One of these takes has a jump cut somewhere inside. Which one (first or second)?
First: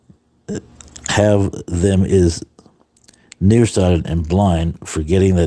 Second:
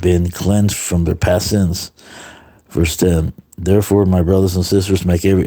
first